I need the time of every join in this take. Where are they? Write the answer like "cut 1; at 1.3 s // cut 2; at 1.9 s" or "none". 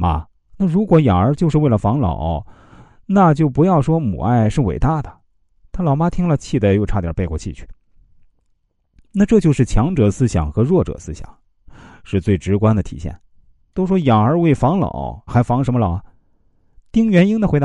cut 1; at 13.7 s // cut 2; at 15.3 s